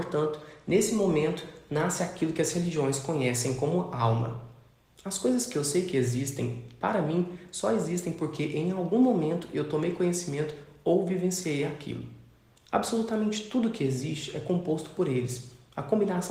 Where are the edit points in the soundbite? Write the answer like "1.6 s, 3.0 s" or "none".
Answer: 12.5 s